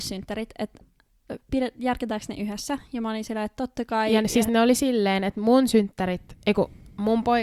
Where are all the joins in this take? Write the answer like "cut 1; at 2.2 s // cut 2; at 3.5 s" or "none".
none